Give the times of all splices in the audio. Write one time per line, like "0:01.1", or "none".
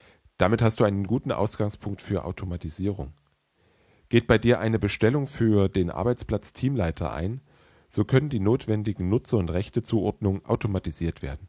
none